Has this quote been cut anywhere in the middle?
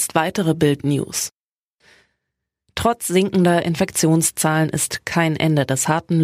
no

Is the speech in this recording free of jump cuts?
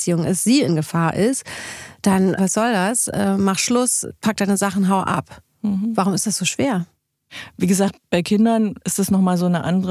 no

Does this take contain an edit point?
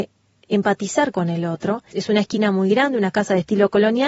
yes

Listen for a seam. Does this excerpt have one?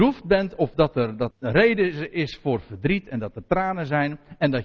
yes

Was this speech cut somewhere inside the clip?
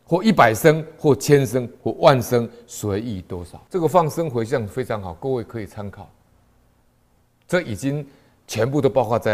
yes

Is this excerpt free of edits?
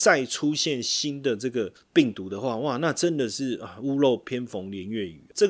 yes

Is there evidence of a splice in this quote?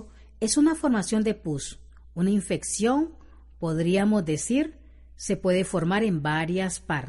no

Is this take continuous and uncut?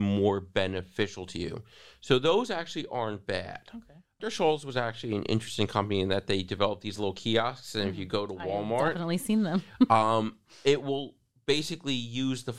no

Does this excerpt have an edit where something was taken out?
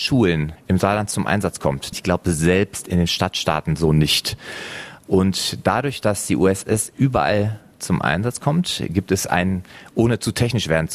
yes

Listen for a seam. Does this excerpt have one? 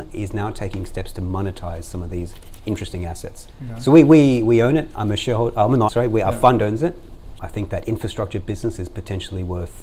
yes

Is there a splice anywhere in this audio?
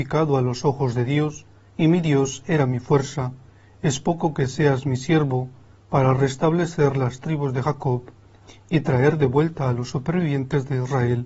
no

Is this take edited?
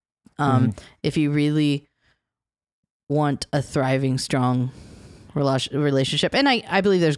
no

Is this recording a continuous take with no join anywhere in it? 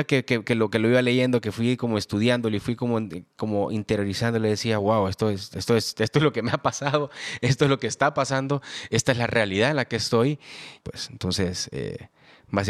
no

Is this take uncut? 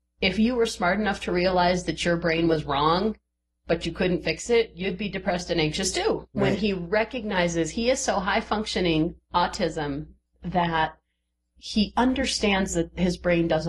no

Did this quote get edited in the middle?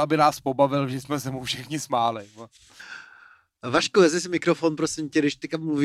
no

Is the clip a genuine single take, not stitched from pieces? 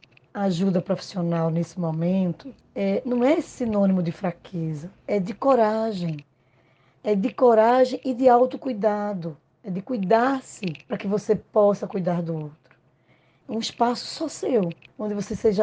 no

